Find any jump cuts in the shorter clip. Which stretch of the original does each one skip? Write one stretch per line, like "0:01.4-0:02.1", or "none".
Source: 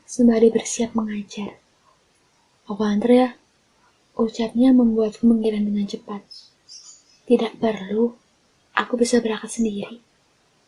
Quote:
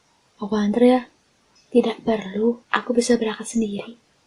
0:03.8-0:07.1
0:08.2-0:08.7